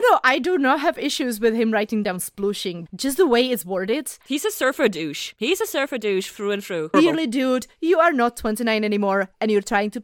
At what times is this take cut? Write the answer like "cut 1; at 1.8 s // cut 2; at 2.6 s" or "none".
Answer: cut 1; at 2.9 s // cut 2; at 6.9 s